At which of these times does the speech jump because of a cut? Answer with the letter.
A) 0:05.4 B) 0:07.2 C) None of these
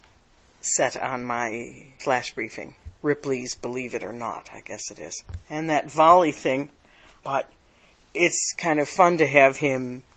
B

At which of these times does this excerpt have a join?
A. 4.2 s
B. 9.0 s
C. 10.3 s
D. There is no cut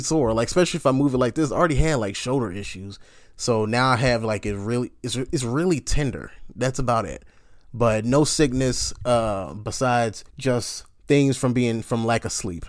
C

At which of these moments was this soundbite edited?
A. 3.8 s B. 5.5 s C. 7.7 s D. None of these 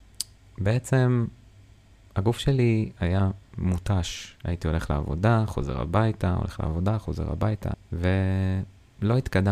C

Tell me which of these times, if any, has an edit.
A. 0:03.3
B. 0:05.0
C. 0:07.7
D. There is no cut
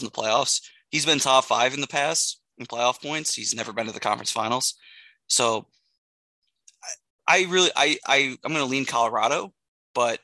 D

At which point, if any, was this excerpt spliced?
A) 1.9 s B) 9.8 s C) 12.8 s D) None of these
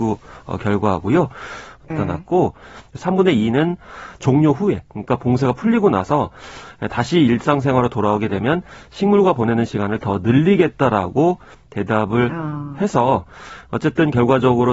A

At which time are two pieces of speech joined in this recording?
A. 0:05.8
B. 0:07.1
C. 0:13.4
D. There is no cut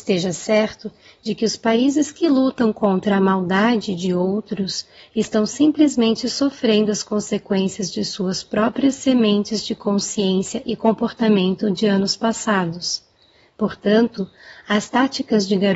D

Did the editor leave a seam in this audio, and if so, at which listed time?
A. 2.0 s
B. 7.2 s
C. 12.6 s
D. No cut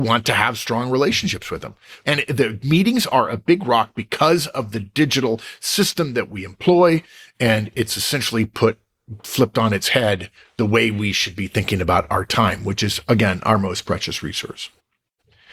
A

